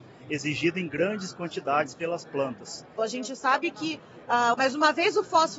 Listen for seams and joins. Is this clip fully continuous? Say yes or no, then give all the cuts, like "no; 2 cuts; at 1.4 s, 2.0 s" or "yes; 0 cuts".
no; 2 cuts; at 3.0 s, 4.5 s